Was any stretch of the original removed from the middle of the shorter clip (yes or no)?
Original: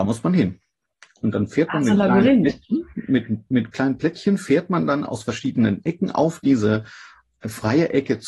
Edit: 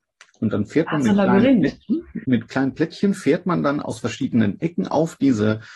yes